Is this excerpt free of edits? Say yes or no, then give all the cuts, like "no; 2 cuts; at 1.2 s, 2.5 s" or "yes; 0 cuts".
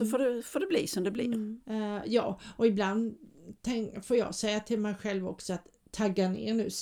no; 1 cut; at 1.6 s